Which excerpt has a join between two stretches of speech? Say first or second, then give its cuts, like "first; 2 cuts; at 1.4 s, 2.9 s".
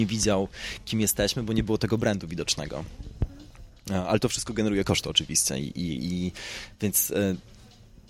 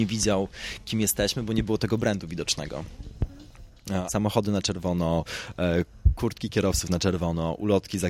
second; 1 cut; at 4.1 s